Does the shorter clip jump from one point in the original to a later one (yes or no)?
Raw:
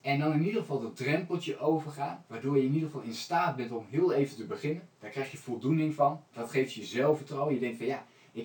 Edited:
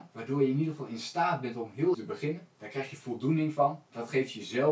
yes